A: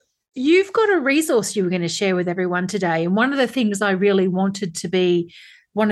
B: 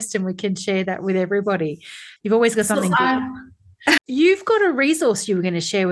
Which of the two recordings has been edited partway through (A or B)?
B